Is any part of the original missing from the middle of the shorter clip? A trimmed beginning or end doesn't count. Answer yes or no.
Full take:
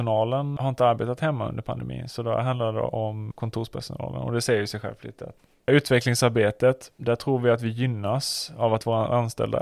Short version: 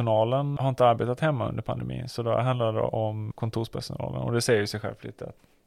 no